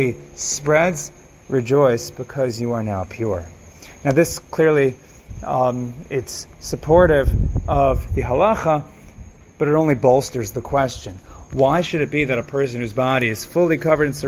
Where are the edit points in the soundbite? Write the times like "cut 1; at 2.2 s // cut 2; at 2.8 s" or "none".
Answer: none